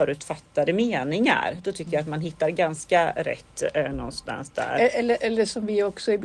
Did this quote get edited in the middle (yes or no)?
no